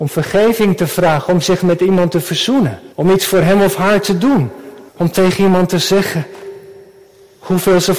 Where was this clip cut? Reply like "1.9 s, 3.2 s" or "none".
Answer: 2.9 s, 4.9 s